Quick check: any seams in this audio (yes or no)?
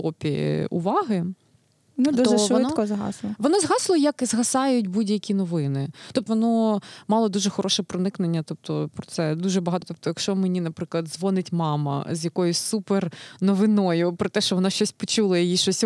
yes